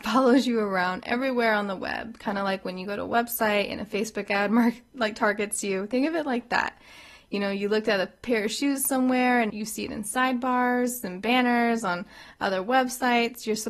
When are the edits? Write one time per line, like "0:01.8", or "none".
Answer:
0:09.5